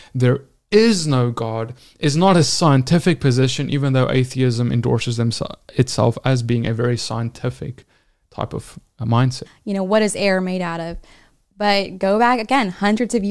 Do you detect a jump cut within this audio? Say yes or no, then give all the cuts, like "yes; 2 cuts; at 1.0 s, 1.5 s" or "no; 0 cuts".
yes; 1 cut; at 9.5 s